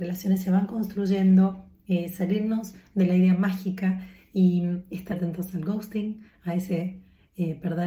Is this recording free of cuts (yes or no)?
no